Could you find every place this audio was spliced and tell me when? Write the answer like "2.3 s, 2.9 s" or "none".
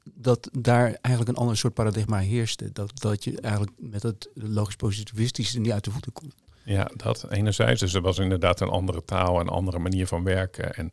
none